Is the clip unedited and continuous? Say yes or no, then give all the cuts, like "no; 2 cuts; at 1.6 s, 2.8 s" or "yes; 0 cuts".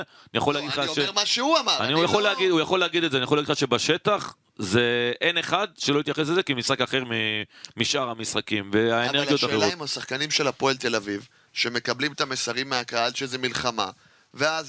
yes; 0 cuts